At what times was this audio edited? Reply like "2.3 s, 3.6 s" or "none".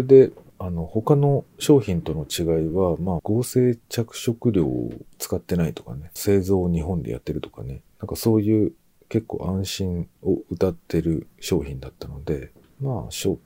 3.2 s, 6.2 s